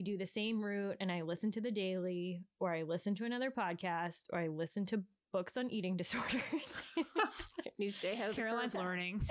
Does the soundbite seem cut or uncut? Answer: uncut